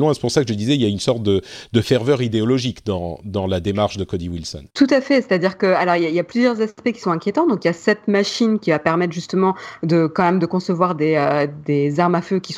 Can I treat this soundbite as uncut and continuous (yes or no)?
no